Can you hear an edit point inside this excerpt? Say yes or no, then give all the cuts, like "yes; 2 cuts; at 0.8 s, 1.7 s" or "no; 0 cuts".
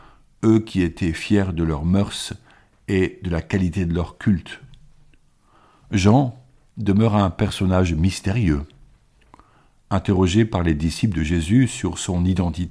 yes; 1 cut; at 6.7 s